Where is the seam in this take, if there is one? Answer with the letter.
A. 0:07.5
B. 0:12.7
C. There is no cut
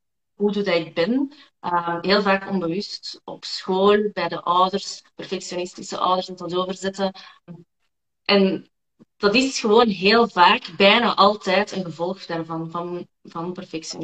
A